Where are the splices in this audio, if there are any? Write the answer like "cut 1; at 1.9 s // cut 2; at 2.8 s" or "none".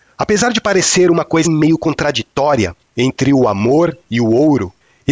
cut 1; at 1.4 s